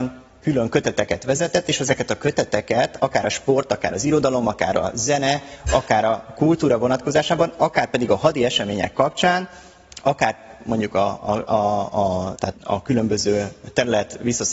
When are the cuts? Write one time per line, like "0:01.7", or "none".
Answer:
0:12.4